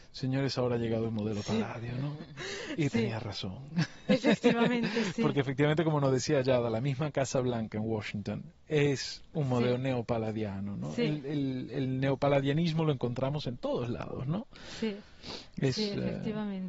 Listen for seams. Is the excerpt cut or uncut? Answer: uncut